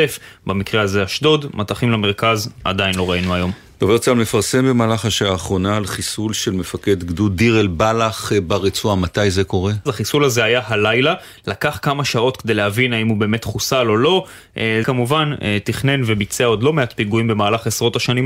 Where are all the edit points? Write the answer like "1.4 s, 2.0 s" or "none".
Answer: 9.9 s, 14.8 s